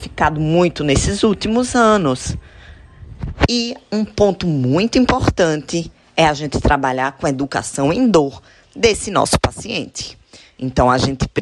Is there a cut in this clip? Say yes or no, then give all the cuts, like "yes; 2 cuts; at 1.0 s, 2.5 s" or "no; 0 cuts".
no; 0 cuts